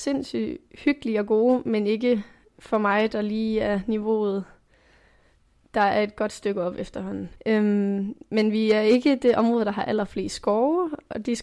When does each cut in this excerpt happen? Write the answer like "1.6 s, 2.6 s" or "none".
7.4 s